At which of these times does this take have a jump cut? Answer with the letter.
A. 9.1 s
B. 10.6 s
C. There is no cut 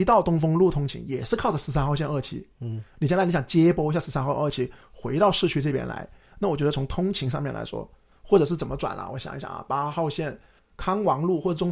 B